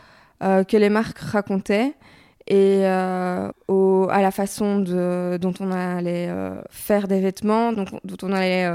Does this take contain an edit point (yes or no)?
yes